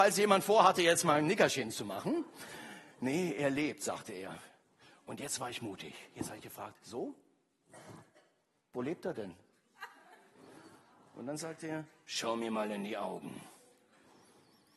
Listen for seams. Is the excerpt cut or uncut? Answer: uncut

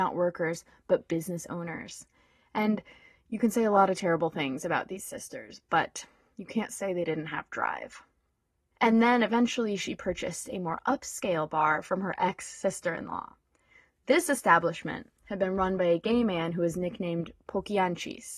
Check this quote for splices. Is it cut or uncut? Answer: cut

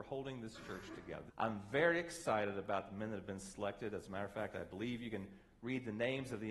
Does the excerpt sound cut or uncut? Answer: cut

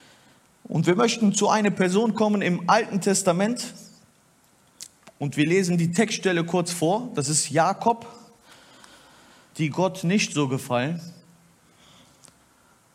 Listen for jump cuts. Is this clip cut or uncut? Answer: cut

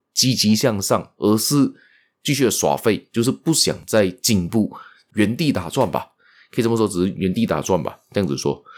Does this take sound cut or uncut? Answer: uncut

